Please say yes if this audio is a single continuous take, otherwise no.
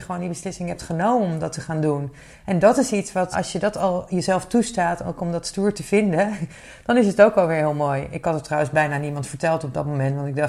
no